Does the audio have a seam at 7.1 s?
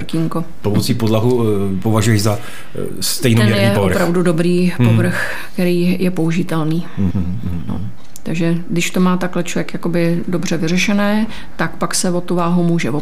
yes; 1 cut; at 7.1 s

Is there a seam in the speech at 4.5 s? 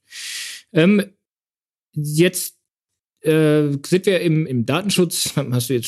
yes; 1 cut; at 4.5 s

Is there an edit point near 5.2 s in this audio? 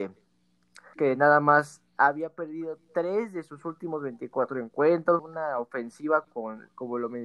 yes; 2 cuts; at 0.9 s, 5.2 s

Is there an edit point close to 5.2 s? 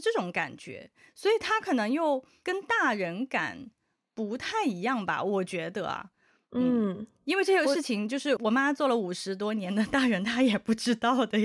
no; 1 cut; at 8.4 s

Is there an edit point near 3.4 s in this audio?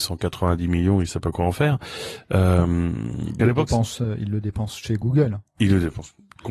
yes; 1 cut; at 3.4 s

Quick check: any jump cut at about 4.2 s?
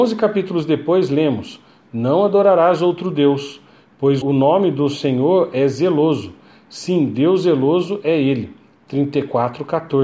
yes; 1 cut; at 4.2 s

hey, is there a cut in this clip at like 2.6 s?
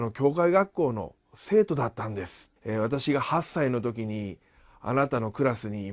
yes; 1 cut; at 2.6 s

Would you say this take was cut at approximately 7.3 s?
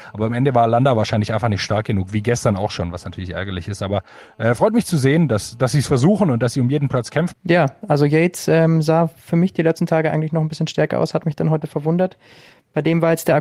yes; 1 cut; at 7.3 s

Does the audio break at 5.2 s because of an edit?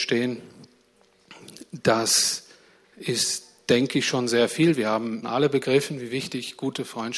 yes; 1 cut; at 5.2 s

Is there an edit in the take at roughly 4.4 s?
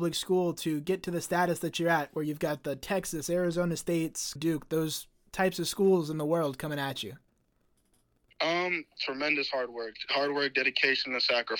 yes; 1 cut; at 4.4 s

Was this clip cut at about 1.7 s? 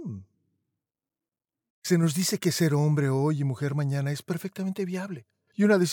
yes; 1 cut; at 1.7 s

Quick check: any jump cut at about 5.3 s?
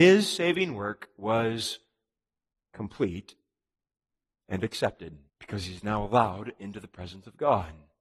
yes; 1 cut; at 5.3 s

